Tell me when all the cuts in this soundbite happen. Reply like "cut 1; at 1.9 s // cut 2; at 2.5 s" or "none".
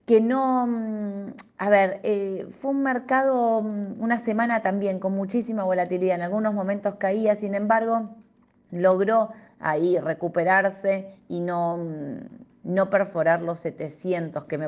none